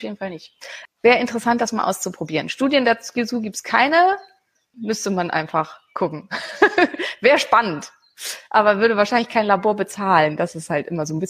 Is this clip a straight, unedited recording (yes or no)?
yes